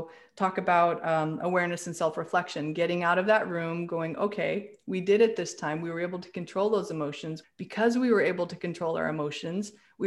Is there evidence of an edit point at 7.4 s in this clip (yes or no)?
yes